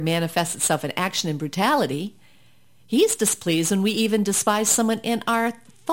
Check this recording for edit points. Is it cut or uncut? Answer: uncut